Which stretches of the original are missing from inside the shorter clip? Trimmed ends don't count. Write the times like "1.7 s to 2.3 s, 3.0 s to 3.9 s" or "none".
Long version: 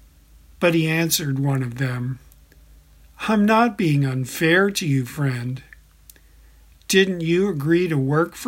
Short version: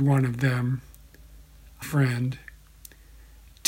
3.2 s to 5.1 s